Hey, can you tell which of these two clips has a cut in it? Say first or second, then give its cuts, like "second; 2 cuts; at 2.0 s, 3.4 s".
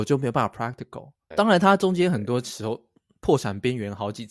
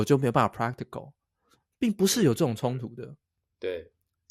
first; 1 cut; at 1.3 s